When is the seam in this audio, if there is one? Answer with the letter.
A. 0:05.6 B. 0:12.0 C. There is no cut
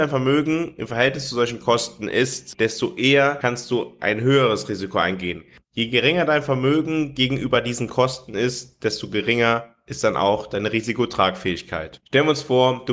B